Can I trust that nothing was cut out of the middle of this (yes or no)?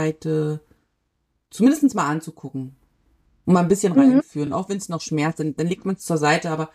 yes